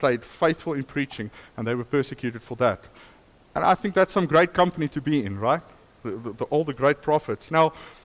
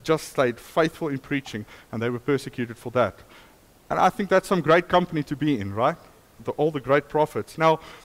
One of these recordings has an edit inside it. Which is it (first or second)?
second